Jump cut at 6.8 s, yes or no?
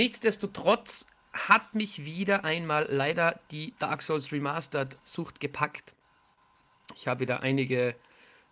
no